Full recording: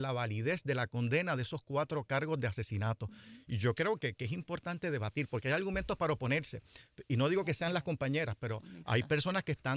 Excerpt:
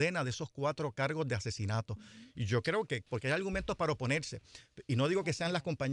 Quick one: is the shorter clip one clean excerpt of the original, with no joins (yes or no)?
no